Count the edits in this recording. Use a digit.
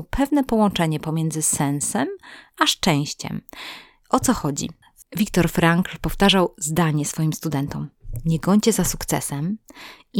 0